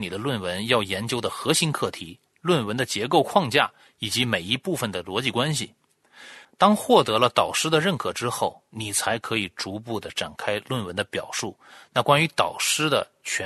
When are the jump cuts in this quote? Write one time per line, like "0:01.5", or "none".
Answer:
0:06.4

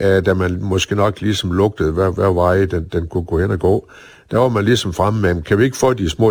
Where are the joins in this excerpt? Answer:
none

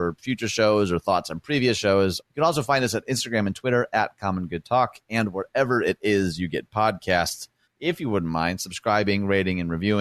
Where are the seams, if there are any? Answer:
0:02.2
0:07.6

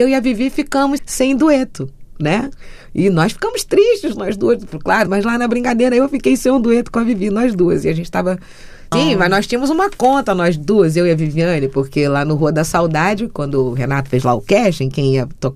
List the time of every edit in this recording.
0:01.0
0:05.1
0:08.9

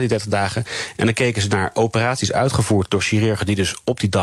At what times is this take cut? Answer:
none

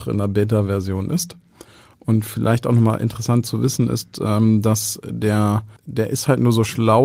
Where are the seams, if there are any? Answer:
0:05.8

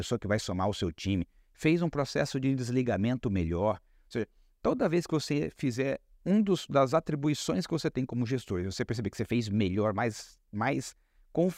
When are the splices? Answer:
none

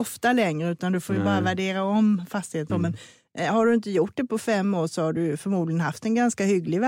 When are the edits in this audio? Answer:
0:02.7

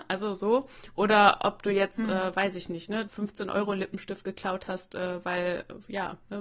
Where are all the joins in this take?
0:03.1

